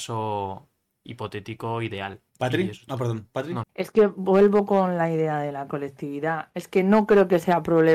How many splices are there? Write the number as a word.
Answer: two